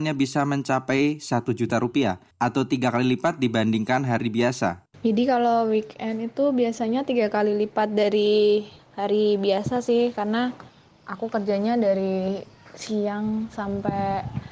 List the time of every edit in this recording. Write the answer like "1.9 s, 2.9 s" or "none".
4.9 s